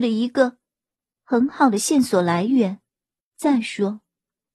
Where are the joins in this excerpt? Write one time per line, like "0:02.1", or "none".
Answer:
0:03.3